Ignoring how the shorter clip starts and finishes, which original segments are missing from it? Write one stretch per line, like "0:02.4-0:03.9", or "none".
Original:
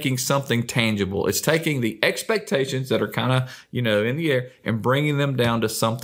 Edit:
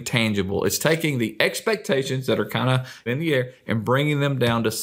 0:03.7-0:04.0